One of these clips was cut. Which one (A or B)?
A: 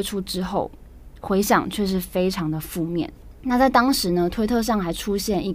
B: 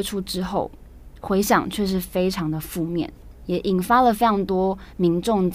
A